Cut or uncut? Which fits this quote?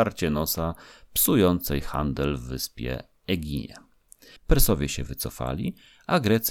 cut